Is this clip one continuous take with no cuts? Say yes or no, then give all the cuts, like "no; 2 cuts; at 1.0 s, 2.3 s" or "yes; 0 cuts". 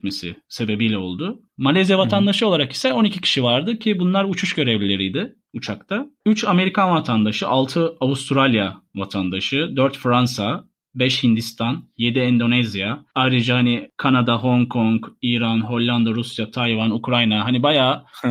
yes; 0 cuts